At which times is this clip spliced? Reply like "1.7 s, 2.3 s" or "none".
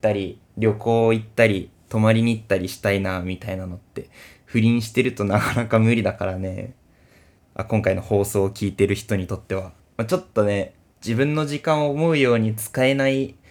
7.4 s, 9.8 s